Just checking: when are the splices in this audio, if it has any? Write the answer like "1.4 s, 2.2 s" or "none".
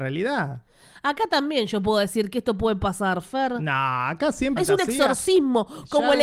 4.6 s